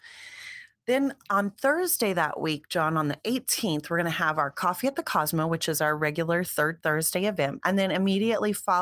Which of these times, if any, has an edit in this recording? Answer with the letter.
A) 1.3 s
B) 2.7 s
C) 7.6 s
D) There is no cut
C